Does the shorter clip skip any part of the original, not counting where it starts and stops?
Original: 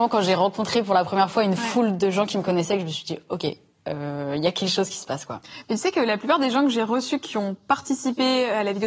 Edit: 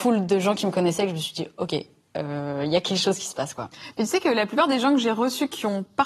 no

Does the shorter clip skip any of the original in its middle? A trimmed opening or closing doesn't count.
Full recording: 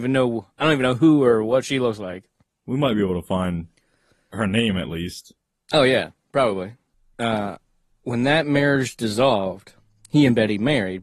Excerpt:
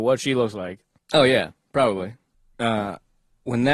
yes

